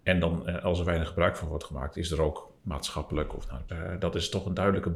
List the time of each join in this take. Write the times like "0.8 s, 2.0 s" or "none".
2.6 s, 3.7 s